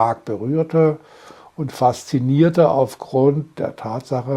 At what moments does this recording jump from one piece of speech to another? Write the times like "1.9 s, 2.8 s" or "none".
none